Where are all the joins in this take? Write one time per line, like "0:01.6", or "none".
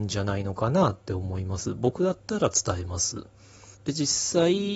0:03.7